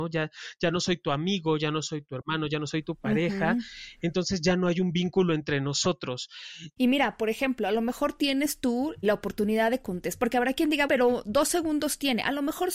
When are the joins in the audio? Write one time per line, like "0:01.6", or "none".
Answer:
0:06.8
0:09.0
0:10.9